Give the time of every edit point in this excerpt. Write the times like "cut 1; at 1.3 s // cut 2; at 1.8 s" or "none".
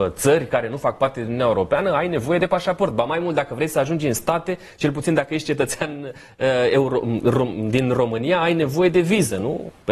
none

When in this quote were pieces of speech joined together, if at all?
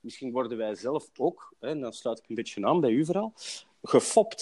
none

